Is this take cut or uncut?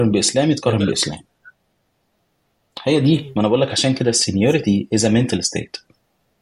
uncut